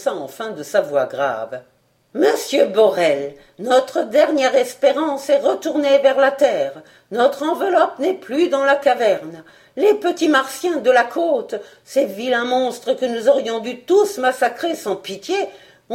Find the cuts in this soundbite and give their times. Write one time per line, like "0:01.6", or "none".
none